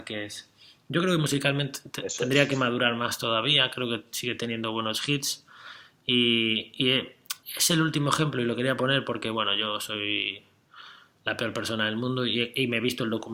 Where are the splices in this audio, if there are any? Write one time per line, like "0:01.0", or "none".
0:07.4